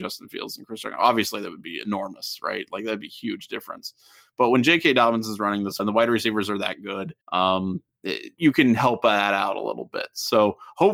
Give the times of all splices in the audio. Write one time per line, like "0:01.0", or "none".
0:05.8
0:07.2
0:08.4